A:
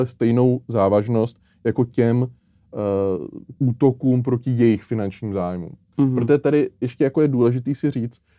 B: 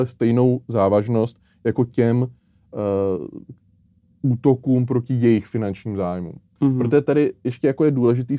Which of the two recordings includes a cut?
A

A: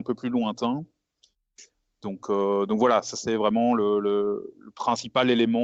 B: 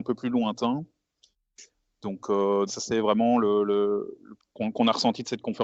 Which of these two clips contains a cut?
B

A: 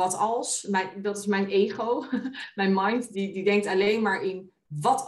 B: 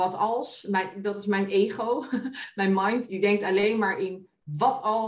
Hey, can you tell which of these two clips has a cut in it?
B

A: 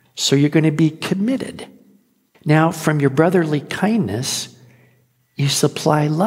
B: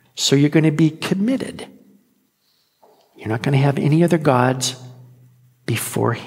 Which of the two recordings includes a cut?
A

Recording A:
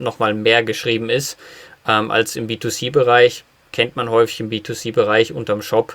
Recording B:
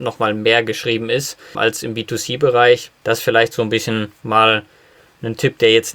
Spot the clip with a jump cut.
B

